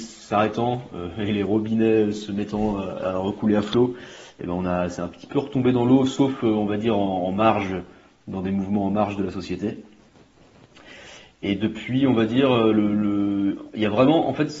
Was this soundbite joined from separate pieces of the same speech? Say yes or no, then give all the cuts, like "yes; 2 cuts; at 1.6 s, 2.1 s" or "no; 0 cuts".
no; 0 cuts